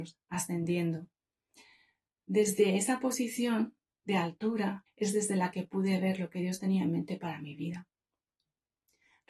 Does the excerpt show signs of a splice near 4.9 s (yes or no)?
yes